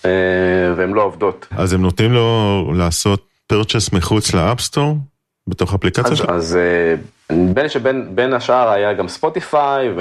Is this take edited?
yes; 2 cuts; at 1.5 s, 6.2 s

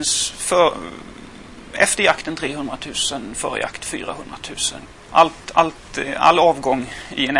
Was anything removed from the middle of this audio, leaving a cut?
no; 0 cuts

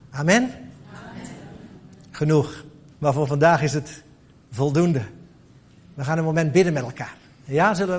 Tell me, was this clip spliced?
yes; 1 cut; at 2.9 s

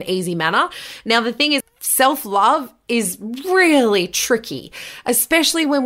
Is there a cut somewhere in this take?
yes; 1 cut; at 1.6 s

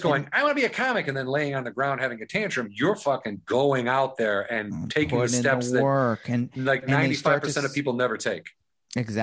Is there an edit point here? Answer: no; 0 cuts

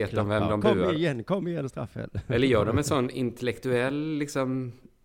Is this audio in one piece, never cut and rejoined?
yes; 0 cuts

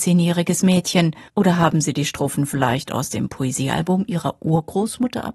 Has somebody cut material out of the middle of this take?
yes; 1 cut; at 1.3 s

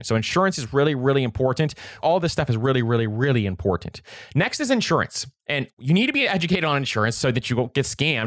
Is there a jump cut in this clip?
yes; 1 cut; at 2.0 s

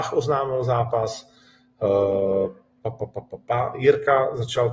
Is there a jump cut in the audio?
no; 0 cuts

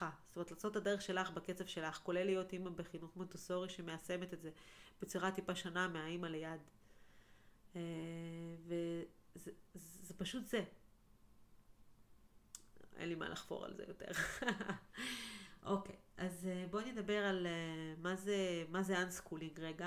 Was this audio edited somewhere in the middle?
no; 0 cuts

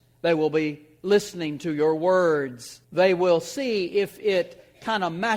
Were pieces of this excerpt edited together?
yes; 1 cut; at 2.8 s

